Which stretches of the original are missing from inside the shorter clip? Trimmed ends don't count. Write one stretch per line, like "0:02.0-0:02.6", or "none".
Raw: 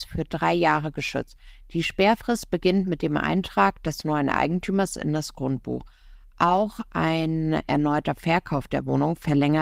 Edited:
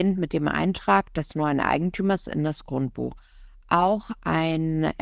none